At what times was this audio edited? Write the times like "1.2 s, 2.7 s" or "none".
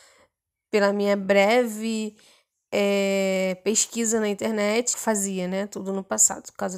4.9 s